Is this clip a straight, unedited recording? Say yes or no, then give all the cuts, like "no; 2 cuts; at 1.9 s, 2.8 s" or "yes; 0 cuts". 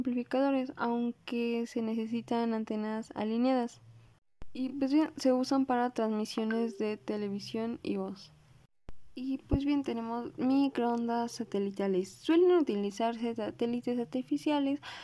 yes; 0 cuts